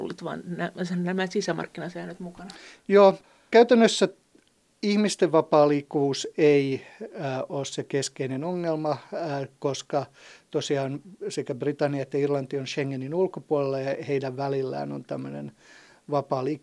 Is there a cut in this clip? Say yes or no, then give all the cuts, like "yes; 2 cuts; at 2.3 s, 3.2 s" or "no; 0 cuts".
no; 0 cuts